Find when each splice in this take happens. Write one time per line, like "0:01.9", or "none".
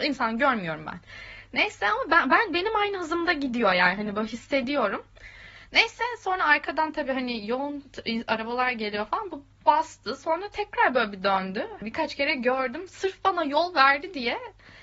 0:11.8